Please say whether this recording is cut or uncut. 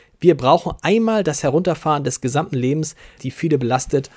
cut